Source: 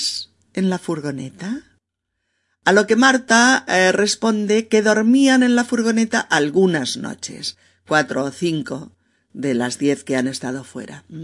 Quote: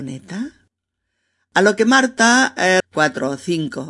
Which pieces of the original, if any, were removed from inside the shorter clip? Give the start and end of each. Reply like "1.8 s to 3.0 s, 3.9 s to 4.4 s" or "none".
3.9 s to 7.7 s